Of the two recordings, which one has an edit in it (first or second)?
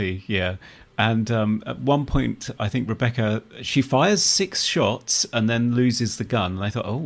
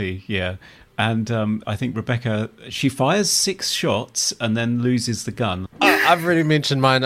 second